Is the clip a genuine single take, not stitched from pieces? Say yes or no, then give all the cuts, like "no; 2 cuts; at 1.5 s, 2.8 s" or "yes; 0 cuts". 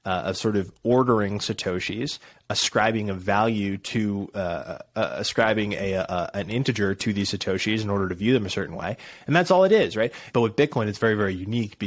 no; 1 cut; at 10.3 s